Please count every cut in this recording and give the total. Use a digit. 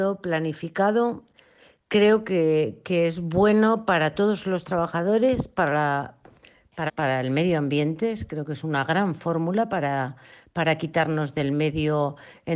1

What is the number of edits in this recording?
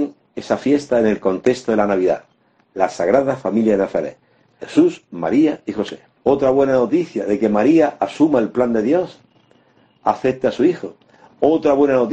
1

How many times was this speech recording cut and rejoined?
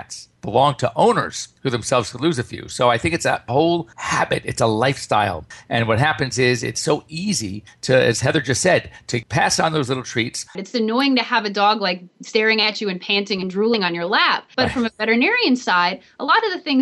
1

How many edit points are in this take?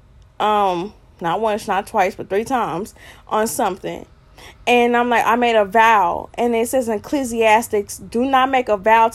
0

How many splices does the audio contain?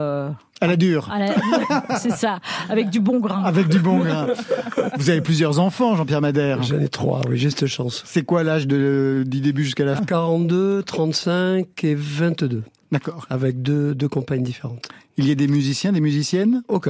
1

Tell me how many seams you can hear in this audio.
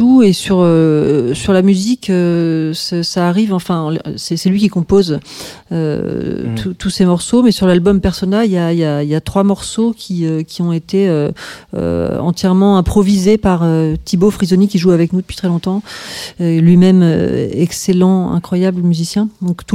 0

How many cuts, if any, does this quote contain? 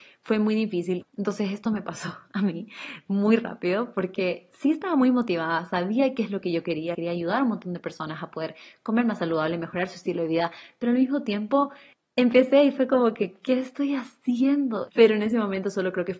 3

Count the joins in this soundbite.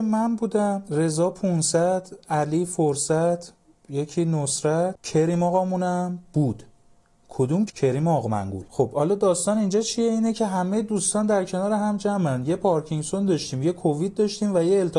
1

